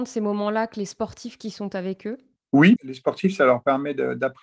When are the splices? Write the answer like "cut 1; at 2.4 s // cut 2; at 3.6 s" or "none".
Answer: cut 1; at 2.8 s